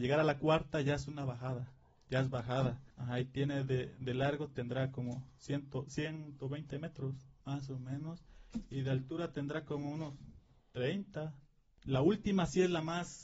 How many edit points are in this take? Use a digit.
0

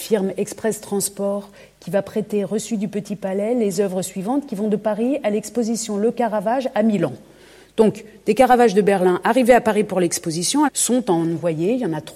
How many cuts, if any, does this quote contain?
1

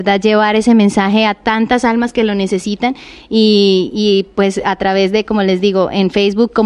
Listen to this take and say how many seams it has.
0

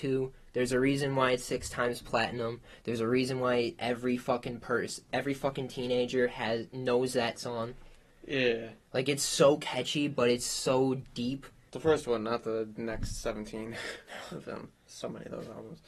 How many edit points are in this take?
1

